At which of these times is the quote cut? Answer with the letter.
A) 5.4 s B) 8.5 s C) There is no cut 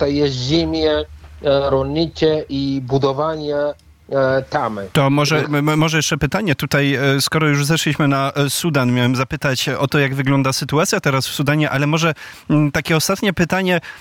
A